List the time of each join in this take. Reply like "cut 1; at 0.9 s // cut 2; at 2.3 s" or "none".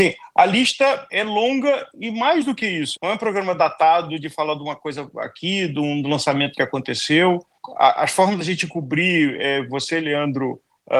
cut 1; at 3.0 s